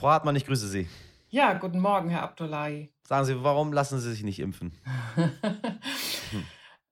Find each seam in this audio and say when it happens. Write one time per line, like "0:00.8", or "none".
none